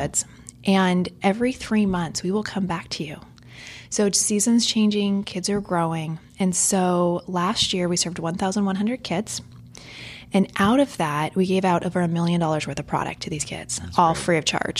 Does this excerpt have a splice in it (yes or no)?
no